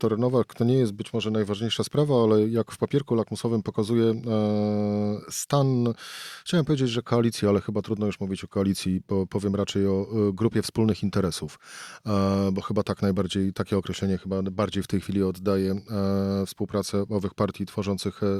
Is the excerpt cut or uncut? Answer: uncut